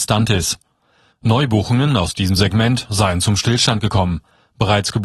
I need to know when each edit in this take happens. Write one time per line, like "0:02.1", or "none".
0:01.1